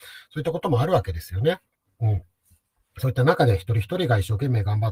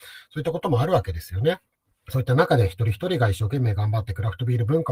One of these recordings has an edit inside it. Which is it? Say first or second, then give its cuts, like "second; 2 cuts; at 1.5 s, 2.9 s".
second; 1 cut; at 1.9 s